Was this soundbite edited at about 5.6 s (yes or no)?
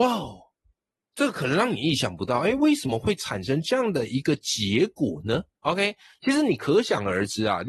yes